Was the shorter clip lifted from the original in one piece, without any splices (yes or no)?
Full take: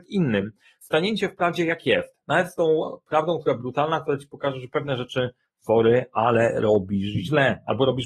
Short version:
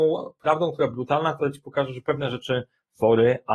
yes